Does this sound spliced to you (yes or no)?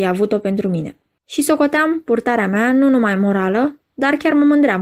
yes